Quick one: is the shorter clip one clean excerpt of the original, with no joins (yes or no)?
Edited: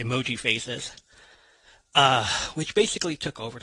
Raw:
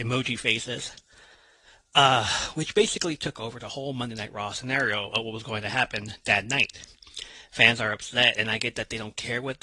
yes